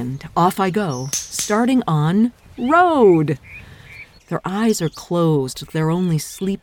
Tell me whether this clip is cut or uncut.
cut